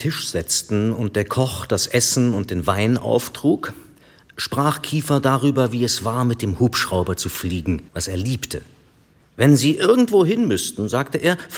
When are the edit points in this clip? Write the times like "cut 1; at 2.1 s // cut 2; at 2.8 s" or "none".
cut 1; at 7.9 s

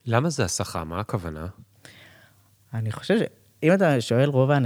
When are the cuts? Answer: none

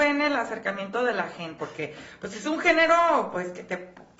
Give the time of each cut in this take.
cut 1; at 1.6 s

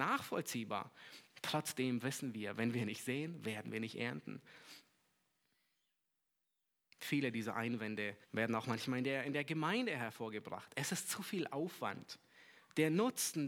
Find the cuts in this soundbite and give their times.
cut 1; at 8.2 s

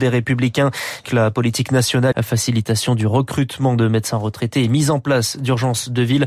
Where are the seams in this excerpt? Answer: cut 1; at 1.1 s // cut 2; at 2.1 s

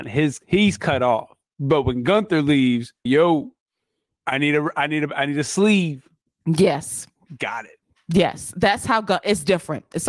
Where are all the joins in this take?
cut 1; at 3.1 s

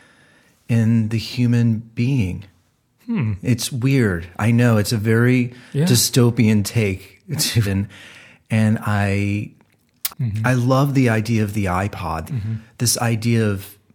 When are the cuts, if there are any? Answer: cut 1; at 7.6 s // cut 2; at 10.1 s // cut 3; at 12.3 s

